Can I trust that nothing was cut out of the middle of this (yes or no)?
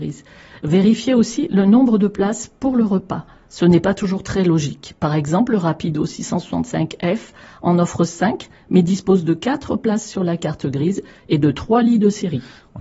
yes